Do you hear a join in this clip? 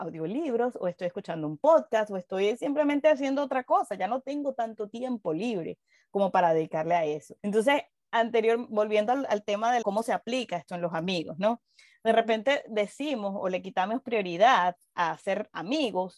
yes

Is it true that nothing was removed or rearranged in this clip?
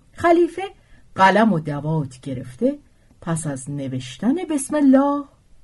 yes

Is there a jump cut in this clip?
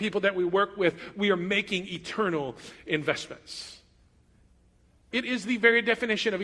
yes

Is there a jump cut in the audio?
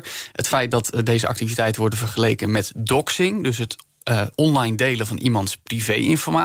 no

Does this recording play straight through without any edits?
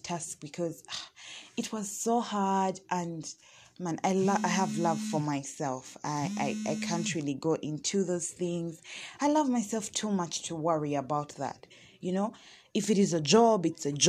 yes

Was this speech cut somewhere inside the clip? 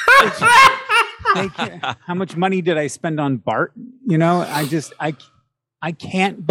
no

